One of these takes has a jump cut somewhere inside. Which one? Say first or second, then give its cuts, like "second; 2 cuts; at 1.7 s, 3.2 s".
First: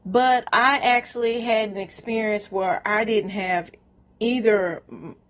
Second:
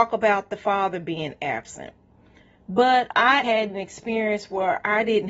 second; 1 cut; at 3.4 s